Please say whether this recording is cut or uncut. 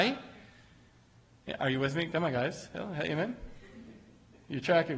uncut